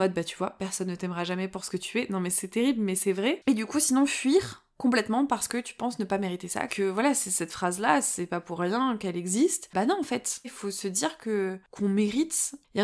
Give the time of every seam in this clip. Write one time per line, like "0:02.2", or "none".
0:06.7
0:10.4

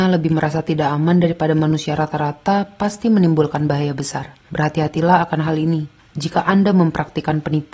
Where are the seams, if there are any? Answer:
0:04.4

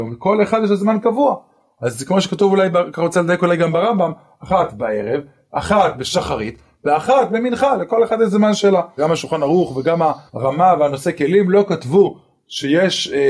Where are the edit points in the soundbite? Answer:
0:09.0
0:10.3

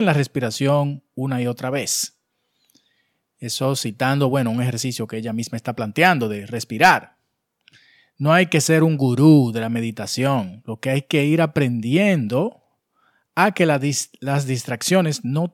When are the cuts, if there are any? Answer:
none

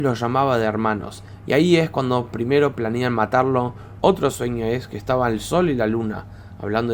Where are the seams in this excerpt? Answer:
0:01.4
0:04.0

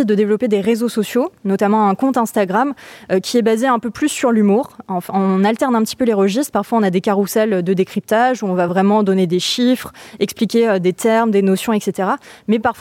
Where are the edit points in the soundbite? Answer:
none

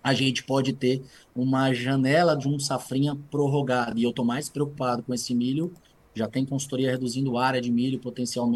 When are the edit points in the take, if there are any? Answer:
none

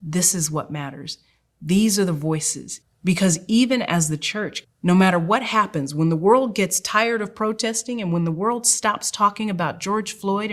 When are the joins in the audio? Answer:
0:02.8
0:04.6

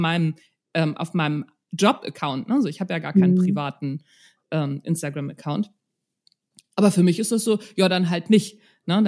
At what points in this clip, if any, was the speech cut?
none

